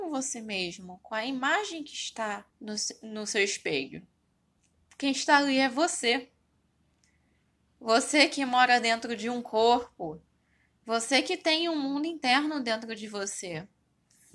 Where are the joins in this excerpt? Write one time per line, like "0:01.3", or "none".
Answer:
0:02.5